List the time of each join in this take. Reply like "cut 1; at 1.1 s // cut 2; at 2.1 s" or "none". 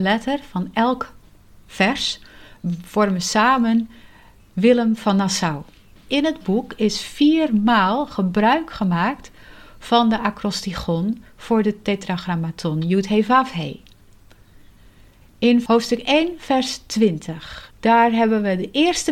cut 1; at 6.0 s // cut 2; at 17.7 s